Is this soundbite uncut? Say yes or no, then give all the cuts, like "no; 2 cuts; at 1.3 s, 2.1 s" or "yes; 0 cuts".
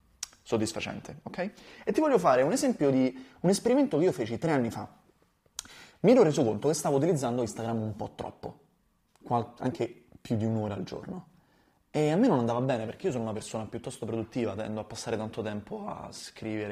yes; 0 cuts